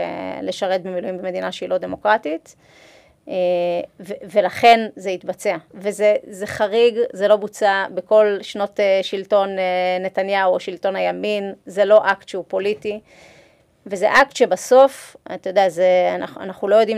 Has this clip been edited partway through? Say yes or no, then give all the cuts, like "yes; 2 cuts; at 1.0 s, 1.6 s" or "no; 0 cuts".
no; 0 cuts